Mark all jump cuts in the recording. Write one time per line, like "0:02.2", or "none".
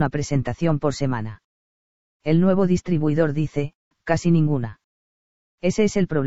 0:03.9